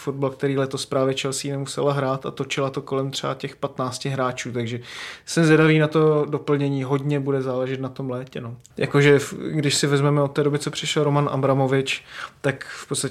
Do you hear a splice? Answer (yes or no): yes